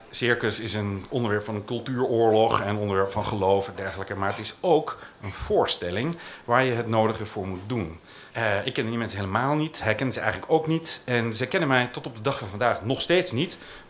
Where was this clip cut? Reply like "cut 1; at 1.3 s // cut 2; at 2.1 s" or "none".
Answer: cut 1; at 8.3 s